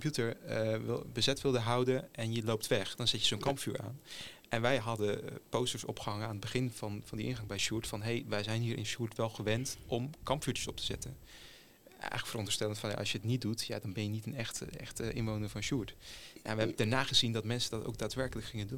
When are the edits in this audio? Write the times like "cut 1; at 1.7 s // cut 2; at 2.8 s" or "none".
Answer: none